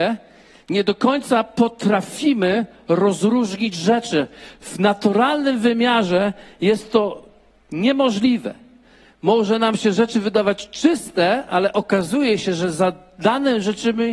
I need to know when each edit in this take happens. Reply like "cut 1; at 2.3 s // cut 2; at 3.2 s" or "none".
none